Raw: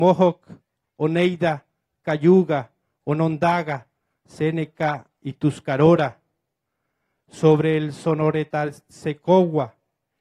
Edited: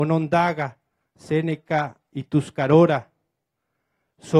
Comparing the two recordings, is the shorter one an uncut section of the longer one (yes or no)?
yes